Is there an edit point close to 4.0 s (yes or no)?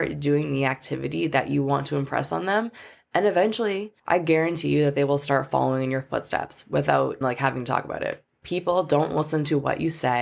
yes